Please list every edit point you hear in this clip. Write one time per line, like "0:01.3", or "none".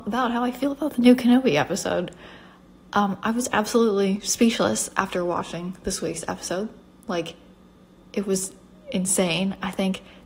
none